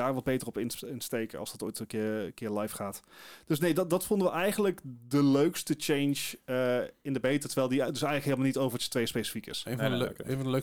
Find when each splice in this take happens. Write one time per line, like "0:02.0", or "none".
none